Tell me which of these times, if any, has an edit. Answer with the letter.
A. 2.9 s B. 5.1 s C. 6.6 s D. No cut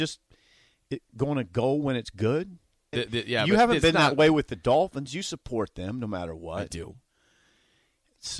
A